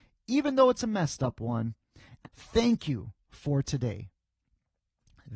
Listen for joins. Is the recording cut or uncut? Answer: cut